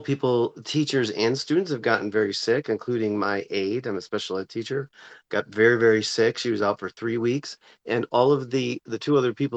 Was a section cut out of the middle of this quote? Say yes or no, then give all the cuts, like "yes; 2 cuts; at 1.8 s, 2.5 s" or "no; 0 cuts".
no; 0 cuts